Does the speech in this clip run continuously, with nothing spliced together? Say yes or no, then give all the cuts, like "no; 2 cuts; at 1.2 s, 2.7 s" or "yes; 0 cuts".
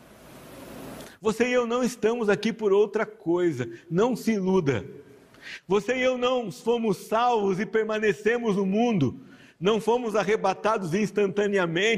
yes; 0 cuts